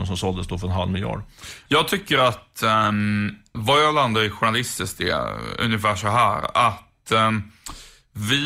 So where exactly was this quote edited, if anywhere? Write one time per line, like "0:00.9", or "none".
0:03.5